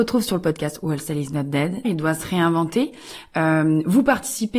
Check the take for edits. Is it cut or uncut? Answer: cut